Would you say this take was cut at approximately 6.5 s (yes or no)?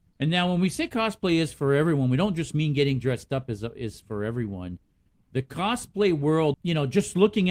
yes